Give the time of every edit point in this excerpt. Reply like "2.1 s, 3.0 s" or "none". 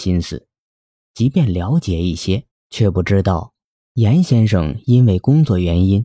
2.5 s, 3.7 s